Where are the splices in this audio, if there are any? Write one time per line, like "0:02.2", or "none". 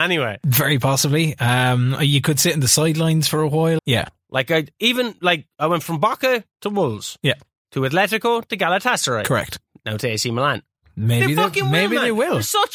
0:03.8
0:10.8